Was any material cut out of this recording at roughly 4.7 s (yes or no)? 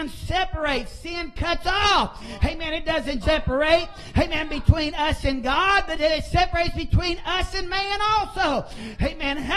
no